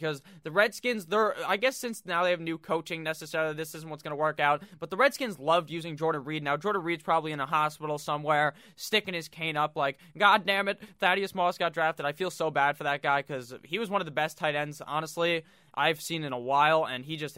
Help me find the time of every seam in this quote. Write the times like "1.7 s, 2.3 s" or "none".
none